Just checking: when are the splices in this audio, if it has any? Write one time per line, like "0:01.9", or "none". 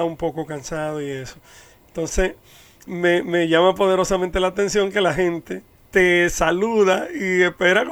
0:02.9